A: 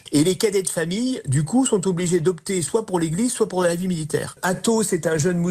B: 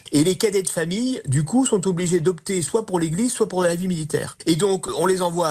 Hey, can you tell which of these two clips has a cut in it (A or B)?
A